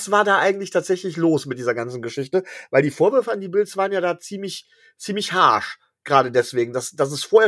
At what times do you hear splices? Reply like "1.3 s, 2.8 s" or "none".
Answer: none